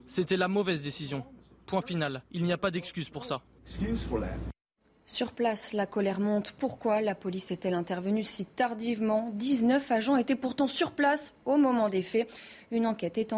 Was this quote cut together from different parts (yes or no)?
no